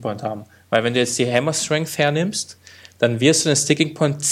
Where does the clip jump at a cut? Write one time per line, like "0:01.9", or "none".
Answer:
none